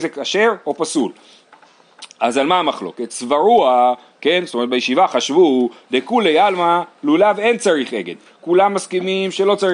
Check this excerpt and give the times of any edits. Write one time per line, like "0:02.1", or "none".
none